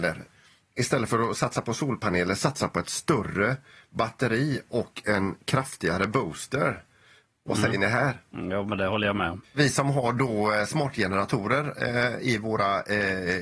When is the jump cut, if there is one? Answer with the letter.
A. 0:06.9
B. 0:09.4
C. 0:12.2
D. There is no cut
B